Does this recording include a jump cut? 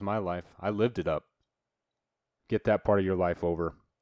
yes; 1 cut; at 2.4 s

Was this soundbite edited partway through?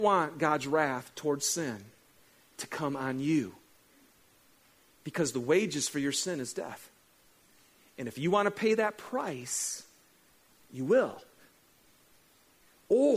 no; 0 cuts

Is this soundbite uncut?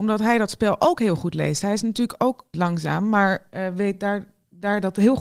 no; 1 cut; at 2.5 s

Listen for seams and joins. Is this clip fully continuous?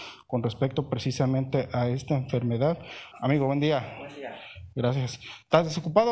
no; 1 cut; at 3.1 s

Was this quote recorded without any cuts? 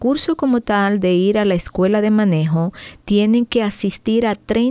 yes; 0 cuts

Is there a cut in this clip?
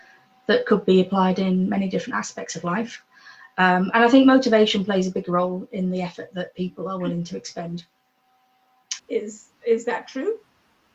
yes; 1 cut; at 9.0 s

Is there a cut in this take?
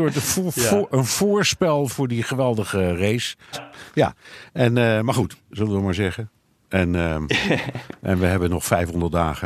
yes; 2 cuts; at 3.5 s, 5.5 s

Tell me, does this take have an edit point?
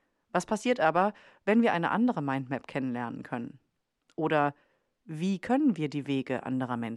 no; 0 cuts

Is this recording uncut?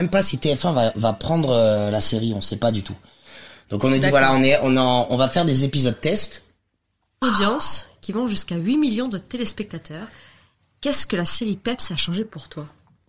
no; 1 cut; at 7.2 s

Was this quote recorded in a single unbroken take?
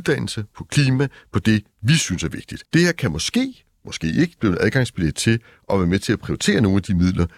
no; 2 cuts; at 2.7 s, 4.4 s

